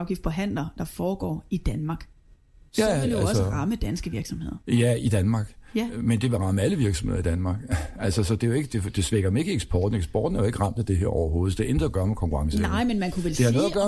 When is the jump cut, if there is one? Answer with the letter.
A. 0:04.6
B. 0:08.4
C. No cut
C